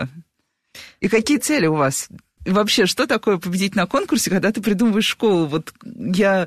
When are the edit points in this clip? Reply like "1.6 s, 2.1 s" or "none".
2.4 s

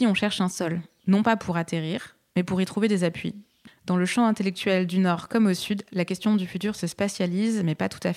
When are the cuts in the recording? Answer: none

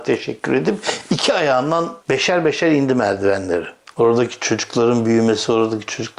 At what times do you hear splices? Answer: 2.0 s, 3.9 s

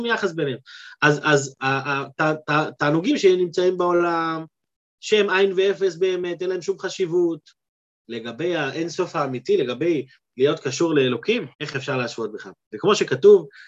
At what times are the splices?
11.5 s

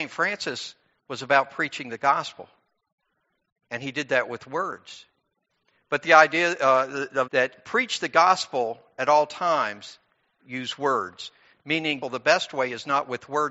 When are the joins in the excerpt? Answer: 7.3 s, 10.4 s, 12.0 s

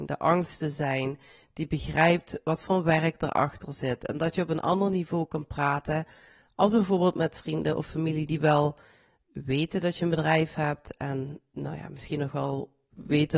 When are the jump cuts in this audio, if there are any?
none

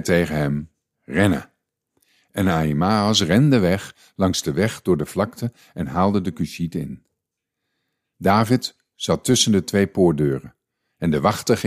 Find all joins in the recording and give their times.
none

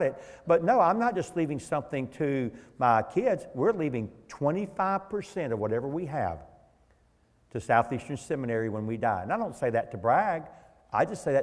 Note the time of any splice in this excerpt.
none

